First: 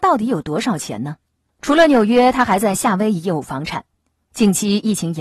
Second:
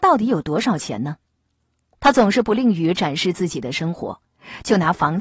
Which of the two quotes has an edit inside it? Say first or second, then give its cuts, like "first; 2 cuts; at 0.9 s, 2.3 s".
first; 1 cut; at 1.5 s